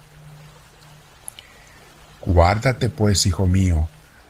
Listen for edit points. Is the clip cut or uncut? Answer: uncut